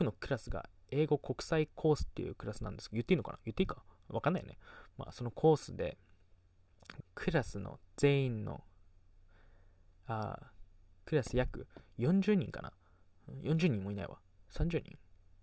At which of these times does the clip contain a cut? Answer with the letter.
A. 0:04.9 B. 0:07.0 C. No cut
B